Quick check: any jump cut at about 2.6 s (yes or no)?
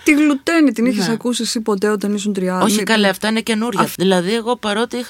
no